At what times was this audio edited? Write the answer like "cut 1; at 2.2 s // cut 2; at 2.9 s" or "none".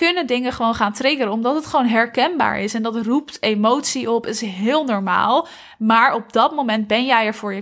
none